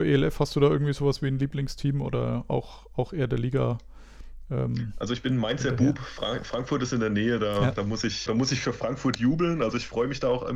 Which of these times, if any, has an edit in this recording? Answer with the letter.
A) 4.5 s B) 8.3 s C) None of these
B